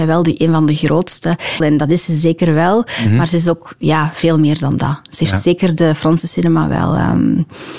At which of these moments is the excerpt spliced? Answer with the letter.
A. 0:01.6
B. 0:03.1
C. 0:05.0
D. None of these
A